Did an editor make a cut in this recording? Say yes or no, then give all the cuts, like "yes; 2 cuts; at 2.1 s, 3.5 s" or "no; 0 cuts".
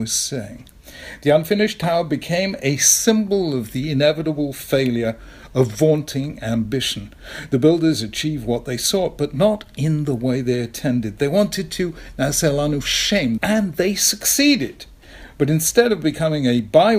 yes; 1 cut; at 13.4 s